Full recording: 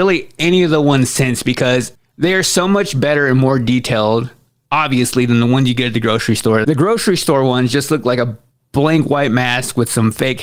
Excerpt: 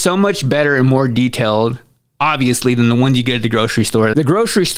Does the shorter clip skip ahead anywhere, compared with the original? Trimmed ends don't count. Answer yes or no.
no